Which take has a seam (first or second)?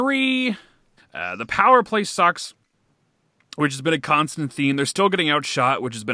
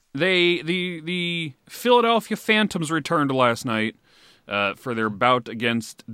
first